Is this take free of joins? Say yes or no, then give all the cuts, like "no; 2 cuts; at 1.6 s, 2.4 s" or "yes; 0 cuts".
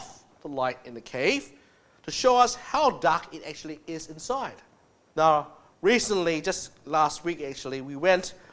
no; 1 cut; at 5.1 s